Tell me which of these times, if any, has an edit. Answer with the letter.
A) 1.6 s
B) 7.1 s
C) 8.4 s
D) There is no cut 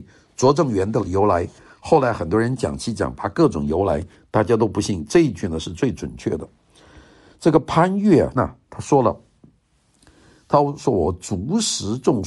C